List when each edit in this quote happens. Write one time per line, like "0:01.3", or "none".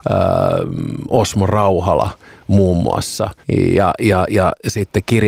0:03.4